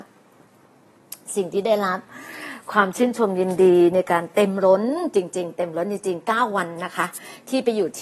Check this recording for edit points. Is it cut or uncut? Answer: uncut